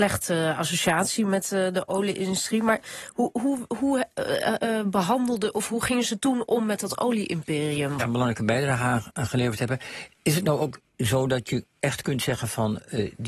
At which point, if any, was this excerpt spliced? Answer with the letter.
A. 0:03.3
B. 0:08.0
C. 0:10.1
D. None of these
B